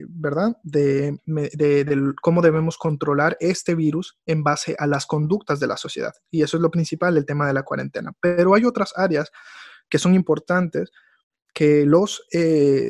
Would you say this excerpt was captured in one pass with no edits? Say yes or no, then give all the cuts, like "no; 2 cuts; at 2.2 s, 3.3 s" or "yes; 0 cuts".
no; 1 cut; at 1.2 s